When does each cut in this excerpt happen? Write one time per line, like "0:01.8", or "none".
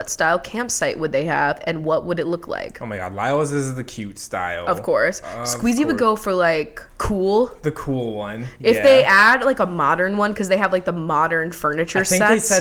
0:06.9